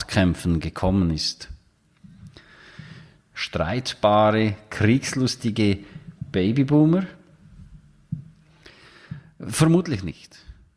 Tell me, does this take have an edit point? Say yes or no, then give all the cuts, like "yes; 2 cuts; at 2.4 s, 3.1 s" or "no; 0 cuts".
yes; 1 cut; at 3.2 s